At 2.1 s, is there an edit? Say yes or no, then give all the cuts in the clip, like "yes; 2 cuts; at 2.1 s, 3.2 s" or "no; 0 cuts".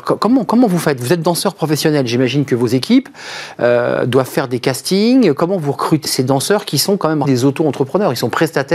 no; 2 cuts; at 6.0 s, 7.2 s